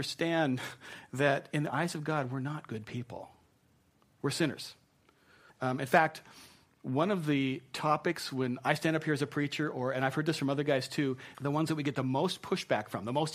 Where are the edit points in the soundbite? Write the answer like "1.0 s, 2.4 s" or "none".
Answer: 5.5 s, 11.3 s